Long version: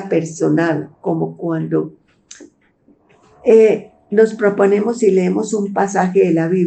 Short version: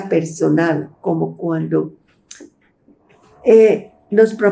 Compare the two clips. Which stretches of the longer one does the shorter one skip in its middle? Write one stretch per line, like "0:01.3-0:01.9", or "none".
none

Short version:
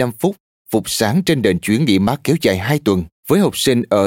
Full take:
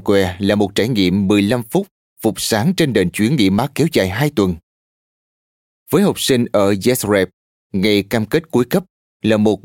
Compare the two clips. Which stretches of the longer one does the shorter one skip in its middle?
0:04.7-0:05.8

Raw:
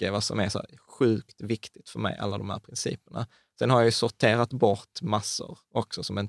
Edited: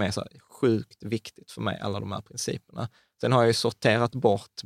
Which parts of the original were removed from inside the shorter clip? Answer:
none

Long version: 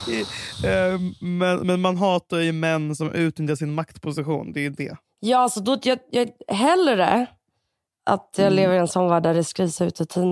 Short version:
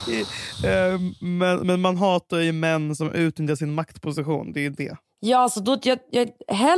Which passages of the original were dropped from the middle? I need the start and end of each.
none

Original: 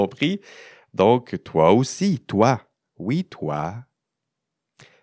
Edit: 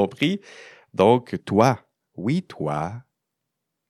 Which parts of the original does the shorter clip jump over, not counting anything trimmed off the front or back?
0:01.4-0:02.2

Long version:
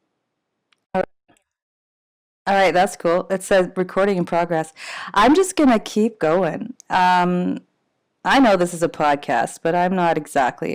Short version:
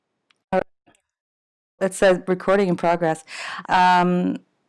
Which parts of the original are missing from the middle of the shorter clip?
0:02.2-0:03.3
0:05.1-0:06.8

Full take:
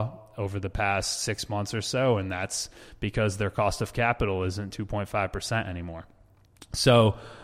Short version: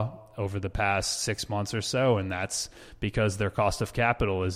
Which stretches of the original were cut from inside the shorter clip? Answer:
none

